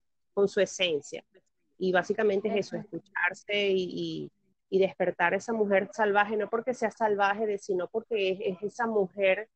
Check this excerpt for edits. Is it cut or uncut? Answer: uncut